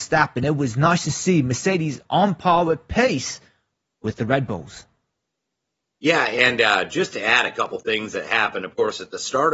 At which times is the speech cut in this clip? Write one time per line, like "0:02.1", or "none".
none